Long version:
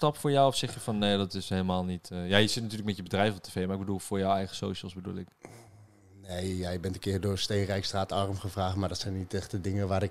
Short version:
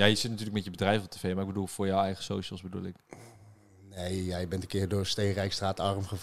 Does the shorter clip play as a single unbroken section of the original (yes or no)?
yes